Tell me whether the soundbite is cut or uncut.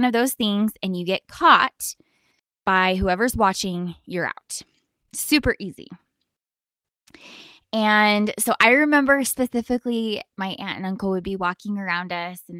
uncut